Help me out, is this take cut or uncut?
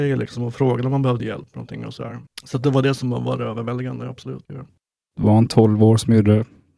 uncut